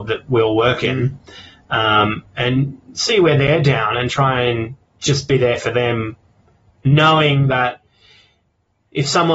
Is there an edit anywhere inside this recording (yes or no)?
no